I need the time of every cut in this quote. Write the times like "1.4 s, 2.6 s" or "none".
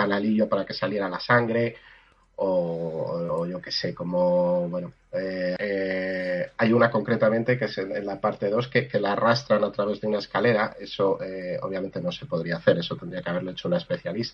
5.6 s